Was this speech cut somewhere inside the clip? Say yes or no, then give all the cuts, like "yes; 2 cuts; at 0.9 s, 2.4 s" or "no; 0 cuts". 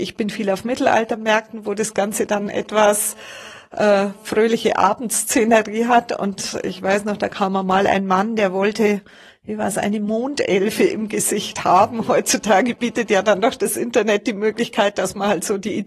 no; 0 cuts